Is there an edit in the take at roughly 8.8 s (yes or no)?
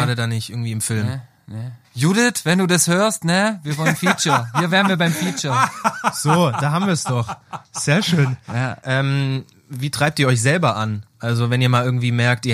yes